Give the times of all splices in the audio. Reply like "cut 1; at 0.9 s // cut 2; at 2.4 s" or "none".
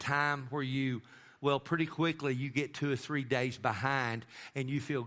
cut 1; at 1.4 s